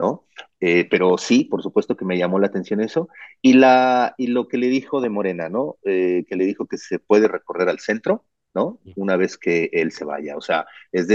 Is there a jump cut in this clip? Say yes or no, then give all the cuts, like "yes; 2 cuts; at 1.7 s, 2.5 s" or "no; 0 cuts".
no; 0 cuts